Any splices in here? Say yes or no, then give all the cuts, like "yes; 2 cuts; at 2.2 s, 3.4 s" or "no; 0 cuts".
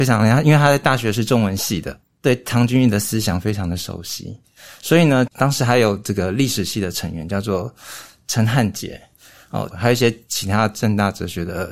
yes; 2 cuts; at 5.3 s, 9.7 s